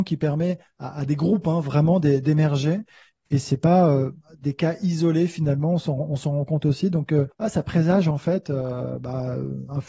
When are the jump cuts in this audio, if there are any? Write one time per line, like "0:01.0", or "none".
0:07.3